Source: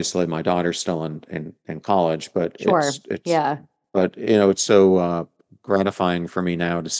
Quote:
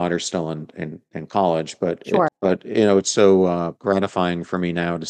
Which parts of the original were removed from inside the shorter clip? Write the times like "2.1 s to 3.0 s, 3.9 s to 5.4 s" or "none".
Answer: 2.8 s to 3.8 s, 5.3 s to 5.6 s